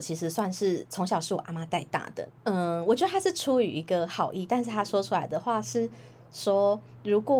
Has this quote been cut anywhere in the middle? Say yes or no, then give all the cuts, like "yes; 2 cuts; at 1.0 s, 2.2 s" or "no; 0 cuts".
yes; 1 cut; at 2.3 s